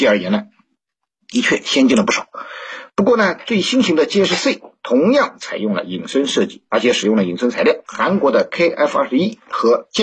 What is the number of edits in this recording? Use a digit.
2